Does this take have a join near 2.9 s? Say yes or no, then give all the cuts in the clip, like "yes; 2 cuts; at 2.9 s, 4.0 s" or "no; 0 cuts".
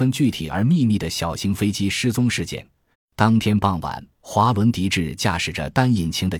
yes; 2 cuts; at 2.9 s, 4.1 s